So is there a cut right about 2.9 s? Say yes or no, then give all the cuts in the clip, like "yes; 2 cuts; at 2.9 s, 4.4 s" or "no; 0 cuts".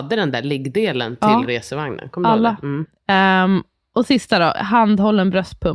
yes; 2 cuts; at 2.9 s, 4.6 s